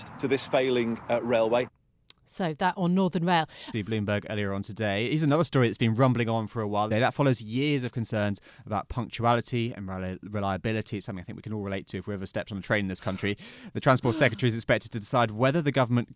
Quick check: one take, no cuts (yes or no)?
no